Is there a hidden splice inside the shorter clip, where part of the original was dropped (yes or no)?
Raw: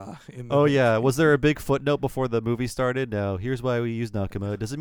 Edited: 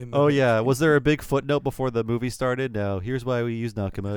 no